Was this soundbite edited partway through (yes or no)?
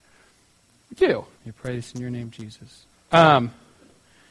yes